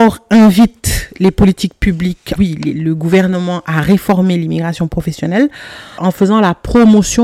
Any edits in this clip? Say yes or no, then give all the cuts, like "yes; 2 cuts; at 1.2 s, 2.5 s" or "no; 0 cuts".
yes; 2 cuts; at 2.4 s, 6.0 s